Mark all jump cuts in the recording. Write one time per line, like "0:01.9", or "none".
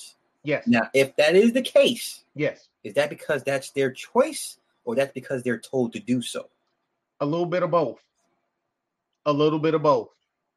none